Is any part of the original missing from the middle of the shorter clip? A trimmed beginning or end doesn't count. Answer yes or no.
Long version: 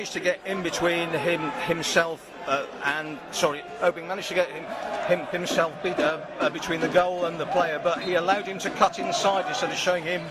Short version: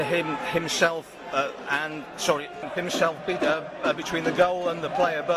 yes